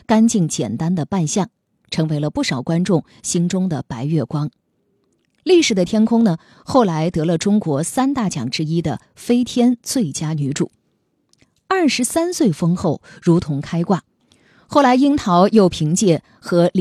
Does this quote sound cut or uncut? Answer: uncut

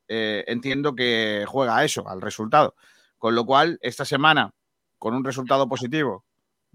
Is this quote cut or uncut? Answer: cut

